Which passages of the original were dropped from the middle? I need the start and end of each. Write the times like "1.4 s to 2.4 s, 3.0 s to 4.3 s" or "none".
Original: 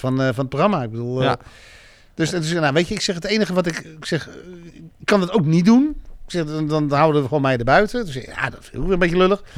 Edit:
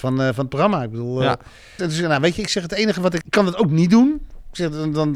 1.8 s to 2.3 s, 3.7 s to 5.0 s